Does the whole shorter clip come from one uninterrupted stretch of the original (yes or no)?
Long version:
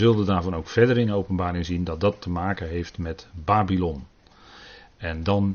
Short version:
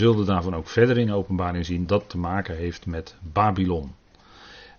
no